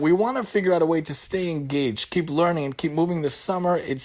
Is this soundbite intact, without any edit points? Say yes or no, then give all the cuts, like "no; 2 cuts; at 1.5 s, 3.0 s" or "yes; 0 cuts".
yes; 0 cuts